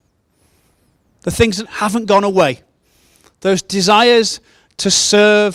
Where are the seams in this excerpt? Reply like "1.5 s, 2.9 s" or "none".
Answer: 1.7 s